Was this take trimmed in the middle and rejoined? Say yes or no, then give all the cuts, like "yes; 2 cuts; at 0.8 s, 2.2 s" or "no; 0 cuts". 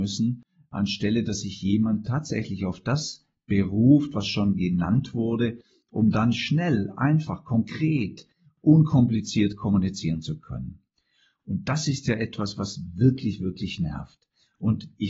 no; 0 cuts